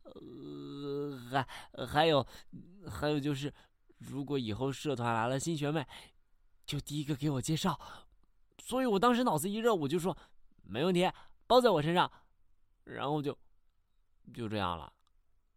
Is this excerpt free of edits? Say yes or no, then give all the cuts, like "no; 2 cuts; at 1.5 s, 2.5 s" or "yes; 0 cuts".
yes; 0 cuts